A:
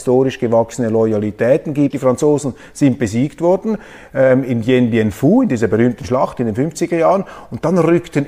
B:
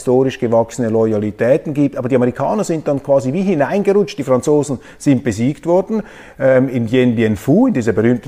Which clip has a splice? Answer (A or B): A